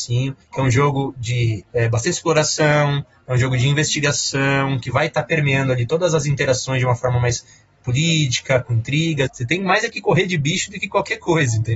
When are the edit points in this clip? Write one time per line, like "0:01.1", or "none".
0:09.3

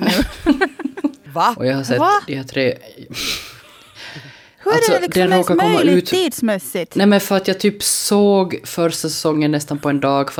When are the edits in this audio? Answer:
0:01.3

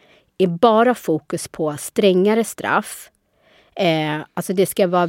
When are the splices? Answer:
none

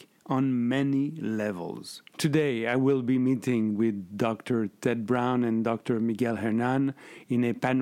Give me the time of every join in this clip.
0:02.1

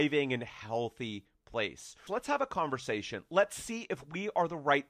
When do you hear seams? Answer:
0:02.1

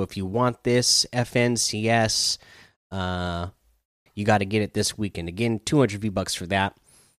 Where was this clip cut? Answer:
0:04.1

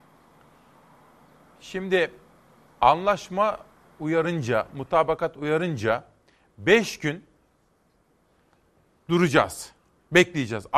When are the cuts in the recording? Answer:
none

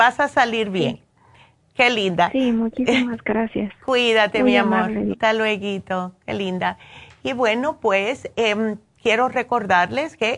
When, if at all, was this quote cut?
0:05.1

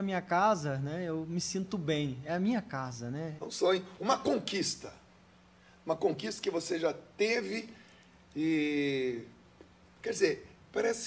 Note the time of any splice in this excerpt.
0:03.4
0:10.0

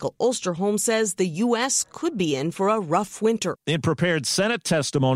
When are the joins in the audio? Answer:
0:03.6

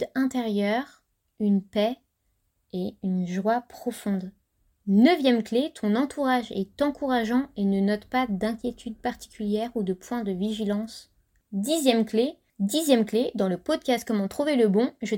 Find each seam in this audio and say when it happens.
none

